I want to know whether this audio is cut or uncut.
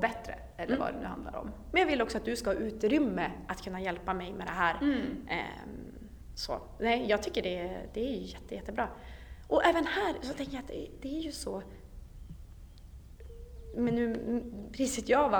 uncut